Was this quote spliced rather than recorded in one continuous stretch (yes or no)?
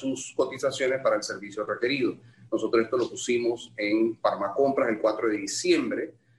no